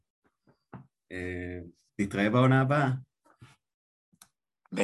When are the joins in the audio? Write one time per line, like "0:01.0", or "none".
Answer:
0:01.9